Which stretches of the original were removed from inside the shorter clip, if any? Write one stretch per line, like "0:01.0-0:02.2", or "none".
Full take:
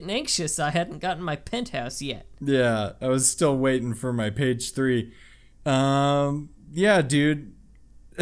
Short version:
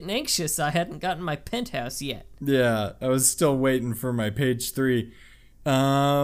none